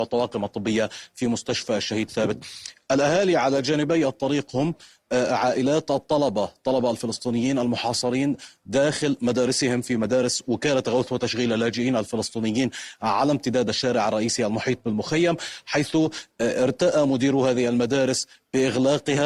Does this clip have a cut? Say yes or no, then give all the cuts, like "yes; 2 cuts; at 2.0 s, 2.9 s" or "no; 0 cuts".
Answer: yes; 1 cut; at 2.1 s